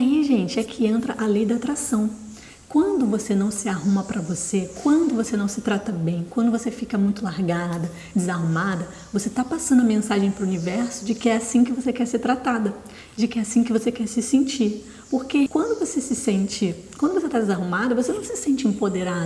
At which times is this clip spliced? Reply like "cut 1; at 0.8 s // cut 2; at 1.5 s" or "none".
cut 1; at 15.5 s